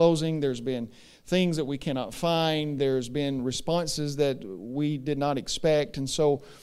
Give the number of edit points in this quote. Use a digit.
0